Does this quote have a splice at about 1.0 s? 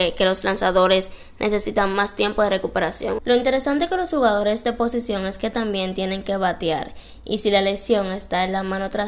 no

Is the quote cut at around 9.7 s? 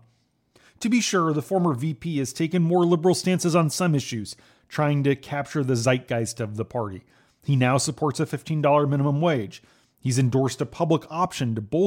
no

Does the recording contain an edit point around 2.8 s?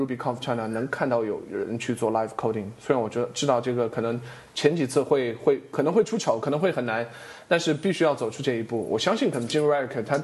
no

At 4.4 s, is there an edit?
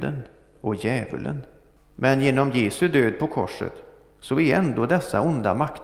no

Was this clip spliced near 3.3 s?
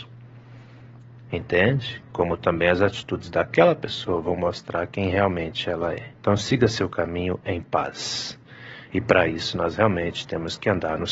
no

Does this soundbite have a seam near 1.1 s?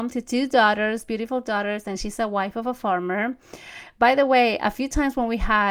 no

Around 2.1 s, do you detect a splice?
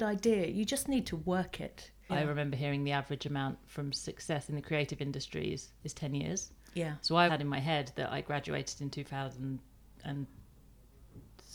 yes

